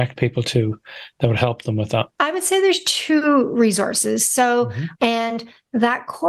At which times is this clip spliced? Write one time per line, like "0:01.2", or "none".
0:02.1
0:04.9